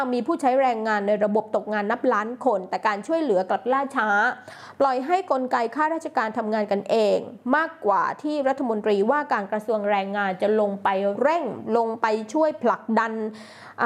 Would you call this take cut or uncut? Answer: uncut